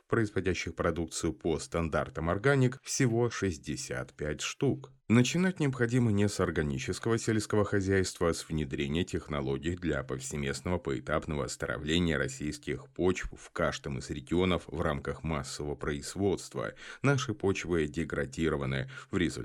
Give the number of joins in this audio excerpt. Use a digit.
1